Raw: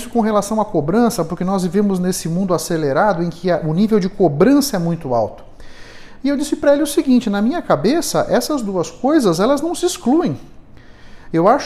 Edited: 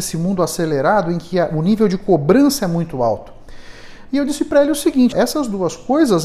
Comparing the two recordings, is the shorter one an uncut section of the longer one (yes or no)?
no